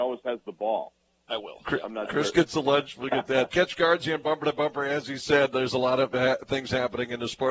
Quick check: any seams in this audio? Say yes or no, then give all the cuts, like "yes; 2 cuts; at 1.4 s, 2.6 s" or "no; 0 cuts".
yes; 2 cuts; at 1.3 s, 3.5 s